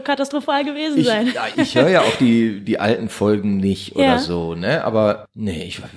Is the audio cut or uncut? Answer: cut